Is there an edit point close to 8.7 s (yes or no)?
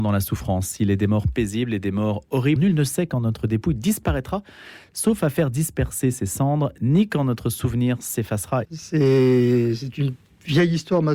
yes